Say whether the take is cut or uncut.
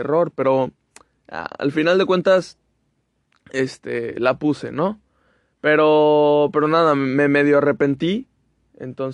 uncut